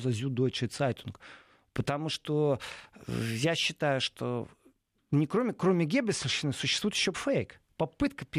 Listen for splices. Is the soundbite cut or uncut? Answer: cut